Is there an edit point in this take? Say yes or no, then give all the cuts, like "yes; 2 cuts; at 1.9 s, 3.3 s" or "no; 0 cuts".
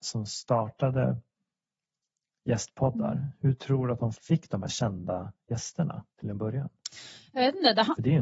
yes; 2 cuts; at 4.1 s, 6.1 s